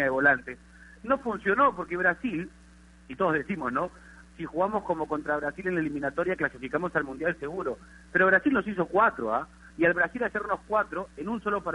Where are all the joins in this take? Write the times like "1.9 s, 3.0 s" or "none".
4.2 s, 9.7 s